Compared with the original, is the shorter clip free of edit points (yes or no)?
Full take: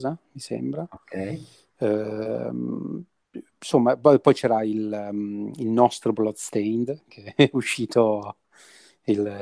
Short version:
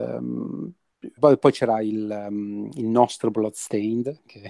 no